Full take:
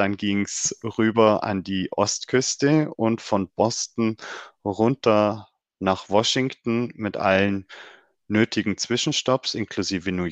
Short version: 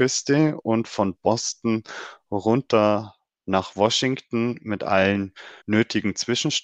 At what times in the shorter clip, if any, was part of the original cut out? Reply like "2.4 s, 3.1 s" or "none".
5.6 s